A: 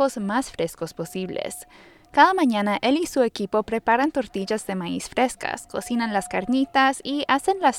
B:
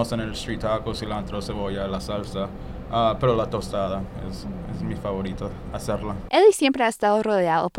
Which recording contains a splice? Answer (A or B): B